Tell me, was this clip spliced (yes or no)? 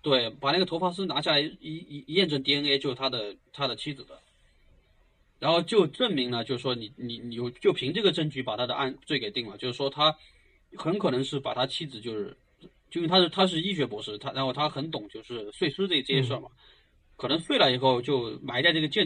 no